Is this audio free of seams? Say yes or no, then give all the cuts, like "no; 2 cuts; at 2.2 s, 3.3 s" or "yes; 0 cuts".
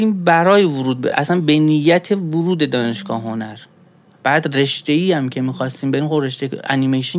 yes; 0 cuts